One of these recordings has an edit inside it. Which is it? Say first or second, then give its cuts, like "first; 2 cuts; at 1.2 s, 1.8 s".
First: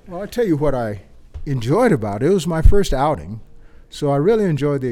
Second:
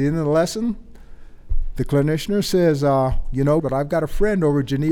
second; 1 cut; at 3.6 s